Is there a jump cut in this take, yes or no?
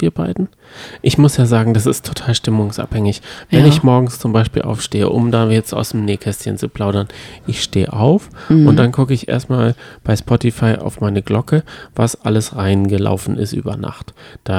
no